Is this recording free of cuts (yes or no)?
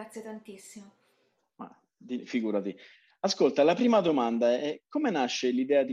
yes